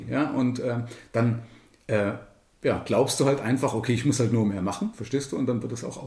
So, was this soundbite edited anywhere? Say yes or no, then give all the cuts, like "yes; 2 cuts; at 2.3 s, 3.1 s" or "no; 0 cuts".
no; 0 cuts